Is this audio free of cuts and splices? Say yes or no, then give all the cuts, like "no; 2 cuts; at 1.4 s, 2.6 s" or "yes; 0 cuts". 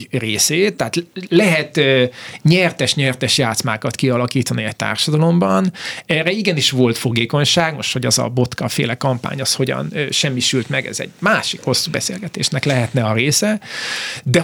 no; 1 cut; at 1.3 s